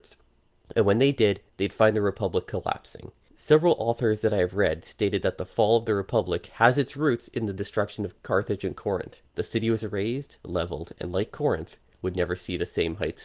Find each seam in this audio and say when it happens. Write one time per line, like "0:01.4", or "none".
0:09.3